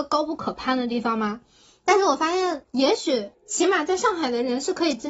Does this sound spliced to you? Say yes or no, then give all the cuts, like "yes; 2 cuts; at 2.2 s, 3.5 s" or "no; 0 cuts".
yes; 1 cut; at 2.6 s